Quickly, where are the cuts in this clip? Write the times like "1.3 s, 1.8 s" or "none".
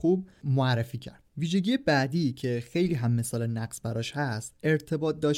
1.3 s